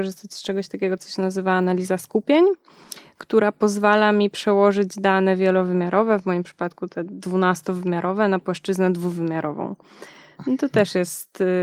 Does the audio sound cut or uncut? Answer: uncut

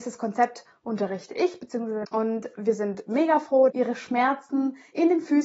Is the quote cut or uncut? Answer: cut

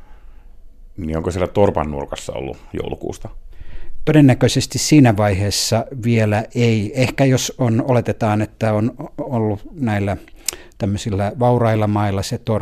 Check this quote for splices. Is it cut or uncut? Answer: uncut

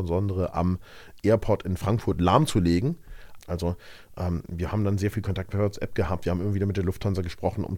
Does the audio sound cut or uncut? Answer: cut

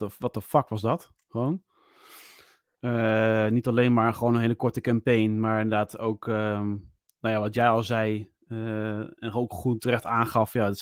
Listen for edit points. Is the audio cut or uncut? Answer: uncut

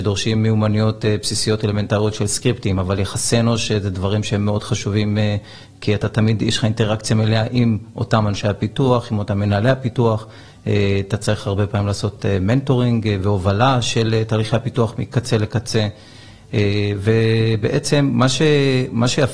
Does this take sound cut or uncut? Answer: uncut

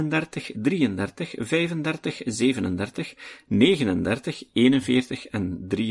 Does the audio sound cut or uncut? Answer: uncut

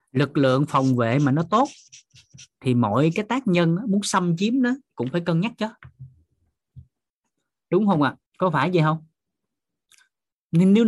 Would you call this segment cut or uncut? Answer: cut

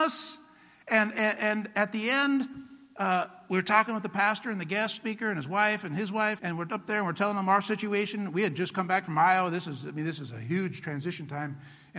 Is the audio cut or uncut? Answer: cut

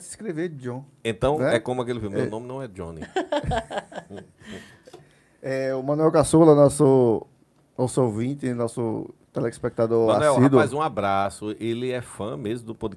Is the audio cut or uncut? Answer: uncut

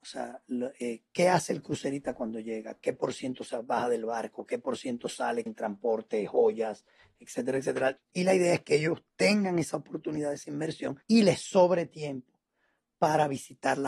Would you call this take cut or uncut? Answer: cut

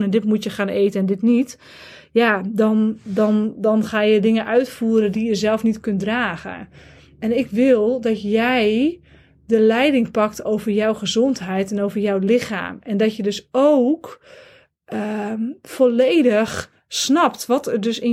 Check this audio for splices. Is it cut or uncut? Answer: uncut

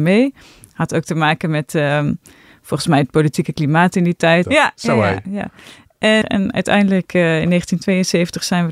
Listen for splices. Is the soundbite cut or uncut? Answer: cut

